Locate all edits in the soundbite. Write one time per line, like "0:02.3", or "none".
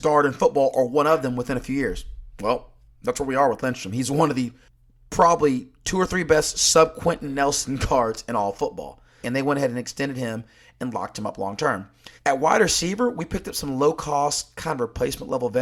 0:09.2
0:12.2